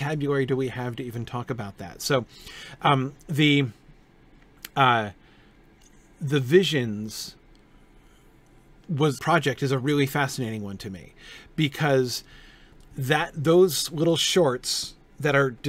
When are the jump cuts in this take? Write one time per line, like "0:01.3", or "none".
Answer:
0:09.2
0:12.8